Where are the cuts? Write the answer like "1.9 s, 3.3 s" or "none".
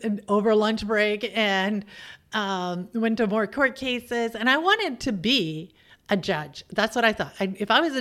none